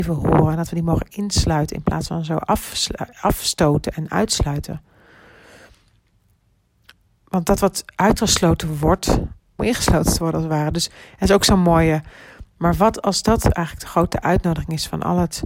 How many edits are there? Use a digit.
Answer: 2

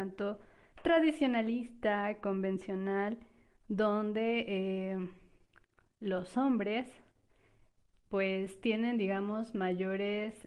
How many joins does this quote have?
0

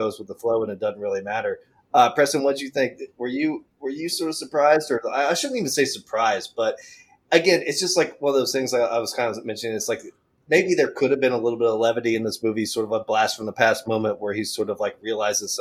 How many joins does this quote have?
0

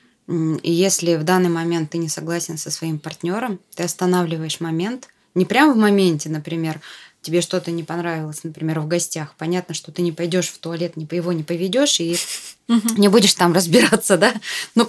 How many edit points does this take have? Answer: 0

